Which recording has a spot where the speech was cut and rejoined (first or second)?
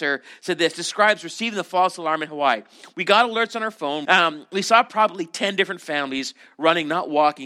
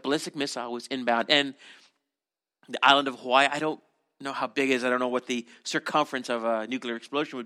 first